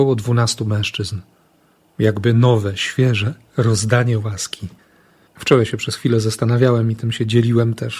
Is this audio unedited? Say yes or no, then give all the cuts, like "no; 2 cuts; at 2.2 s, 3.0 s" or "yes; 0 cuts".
no; 1 cut; at 5.3 s